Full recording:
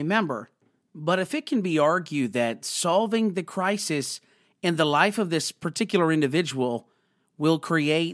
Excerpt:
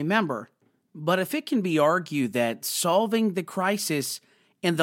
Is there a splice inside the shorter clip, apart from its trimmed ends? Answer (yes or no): no